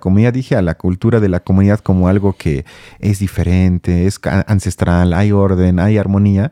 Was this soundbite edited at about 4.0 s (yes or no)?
no